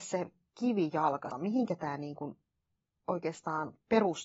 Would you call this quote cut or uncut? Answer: cut